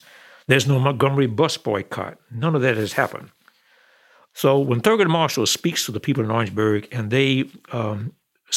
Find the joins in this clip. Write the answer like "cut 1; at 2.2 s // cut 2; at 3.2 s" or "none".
none